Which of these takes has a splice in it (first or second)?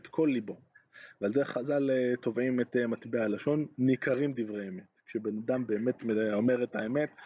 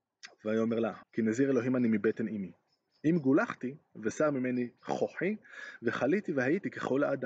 second